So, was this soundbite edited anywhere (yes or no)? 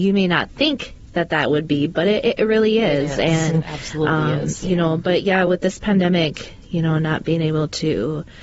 no